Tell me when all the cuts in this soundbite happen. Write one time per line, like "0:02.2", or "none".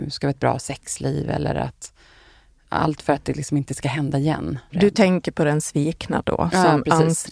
0:04.7